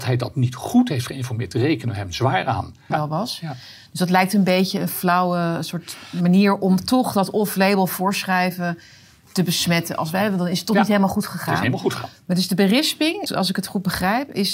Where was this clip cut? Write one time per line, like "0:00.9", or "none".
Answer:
0:02.9
0:13.3